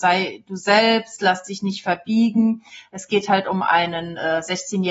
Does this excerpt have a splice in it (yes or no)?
no